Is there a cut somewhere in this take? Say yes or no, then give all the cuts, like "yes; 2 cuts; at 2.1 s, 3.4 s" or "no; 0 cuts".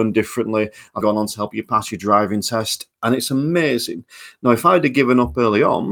yes; 1 cut; at 1.0 s